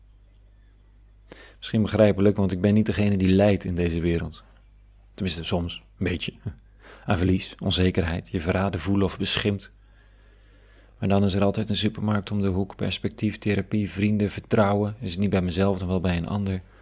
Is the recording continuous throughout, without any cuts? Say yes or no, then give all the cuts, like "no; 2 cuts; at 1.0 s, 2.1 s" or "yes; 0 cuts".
yes; 0 cuts